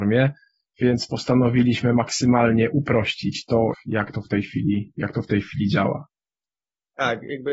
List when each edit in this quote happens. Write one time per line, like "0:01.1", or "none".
0:03.7